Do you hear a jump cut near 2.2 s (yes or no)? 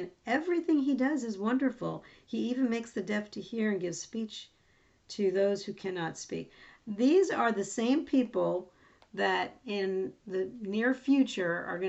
no